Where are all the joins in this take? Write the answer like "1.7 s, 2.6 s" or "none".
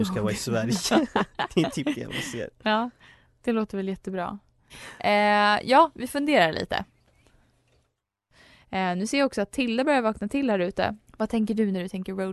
4.7 s, 11.1 s